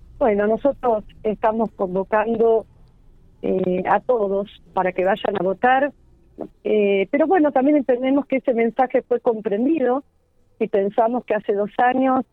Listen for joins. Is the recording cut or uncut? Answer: cut